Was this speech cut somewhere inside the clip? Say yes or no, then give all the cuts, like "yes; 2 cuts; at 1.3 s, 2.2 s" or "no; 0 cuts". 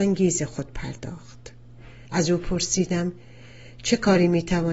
yes; 1 cut; at 2.1 s